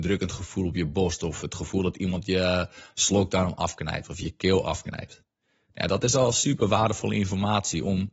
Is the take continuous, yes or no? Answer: yes